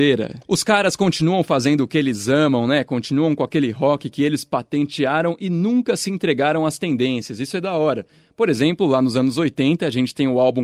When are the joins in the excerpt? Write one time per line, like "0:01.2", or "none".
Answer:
none